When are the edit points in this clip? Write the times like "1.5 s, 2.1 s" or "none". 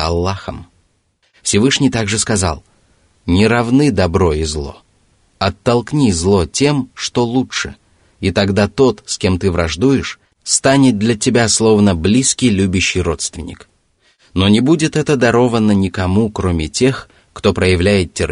1.2 s